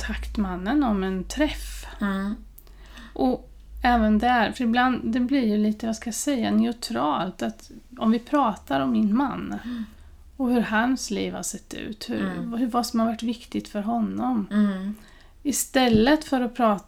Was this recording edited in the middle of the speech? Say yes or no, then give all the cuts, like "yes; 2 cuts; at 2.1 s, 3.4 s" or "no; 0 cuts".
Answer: no; 0 cuts